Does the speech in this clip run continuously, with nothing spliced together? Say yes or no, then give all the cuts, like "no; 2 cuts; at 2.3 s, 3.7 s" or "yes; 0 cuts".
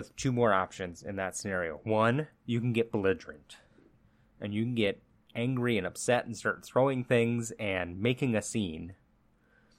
no; 1 cut; at 2.3 s